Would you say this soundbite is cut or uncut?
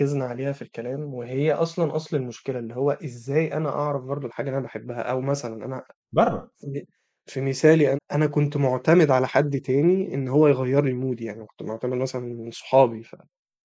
cut